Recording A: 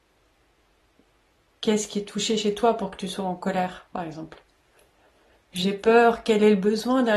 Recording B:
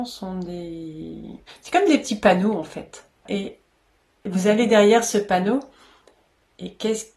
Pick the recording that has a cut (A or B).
B